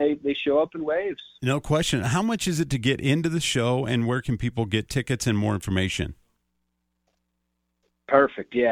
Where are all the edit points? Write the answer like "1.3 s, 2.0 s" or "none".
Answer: none